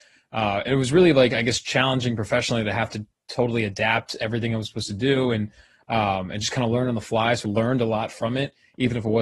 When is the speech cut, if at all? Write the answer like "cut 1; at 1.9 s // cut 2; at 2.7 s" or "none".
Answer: cut 1; at 7.4 s